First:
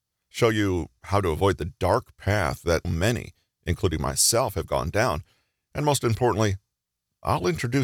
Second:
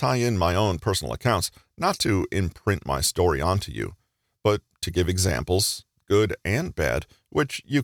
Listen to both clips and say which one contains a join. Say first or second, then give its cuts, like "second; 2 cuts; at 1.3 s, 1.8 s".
first; 1 cut; at 2.8 s